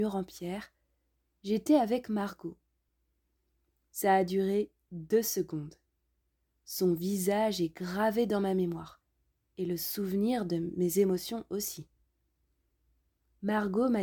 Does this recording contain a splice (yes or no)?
no